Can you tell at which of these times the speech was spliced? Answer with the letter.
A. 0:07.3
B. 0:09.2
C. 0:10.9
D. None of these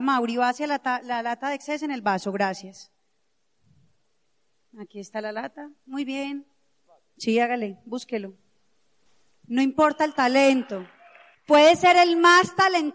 D